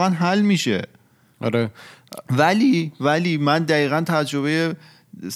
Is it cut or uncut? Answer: uncut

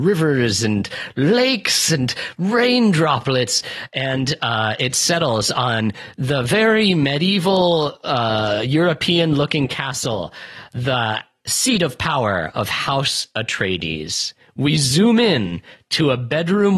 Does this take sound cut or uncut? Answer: uncut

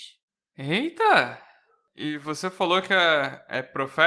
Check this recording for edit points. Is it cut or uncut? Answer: uncut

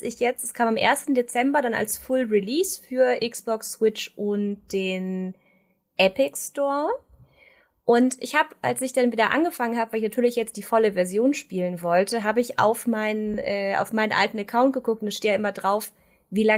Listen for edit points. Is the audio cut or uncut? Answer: uncut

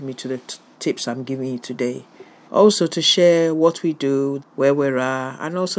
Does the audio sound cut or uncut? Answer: cut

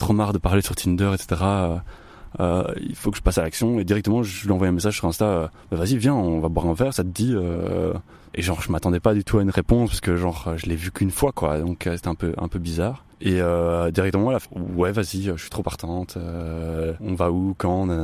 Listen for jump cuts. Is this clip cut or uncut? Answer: cut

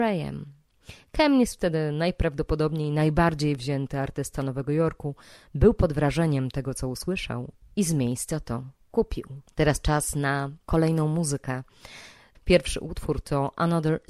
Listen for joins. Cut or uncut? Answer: cut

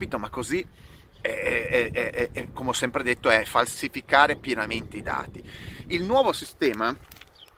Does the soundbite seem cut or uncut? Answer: uncut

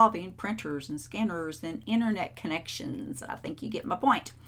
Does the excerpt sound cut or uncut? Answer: uncut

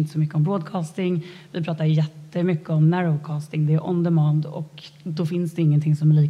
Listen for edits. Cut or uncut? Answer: uncut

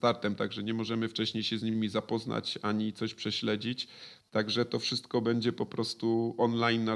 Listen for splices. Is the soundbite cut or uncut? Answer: uncut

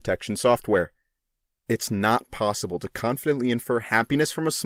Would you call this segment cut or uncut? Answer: uncut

